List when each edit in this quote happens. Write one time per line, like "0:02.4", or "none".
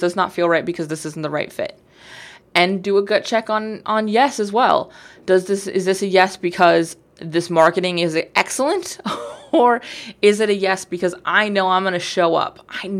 none